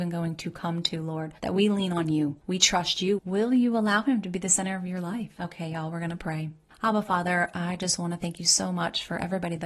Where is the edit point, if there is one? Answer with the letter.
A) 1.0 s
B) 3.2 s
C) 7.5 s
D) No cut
B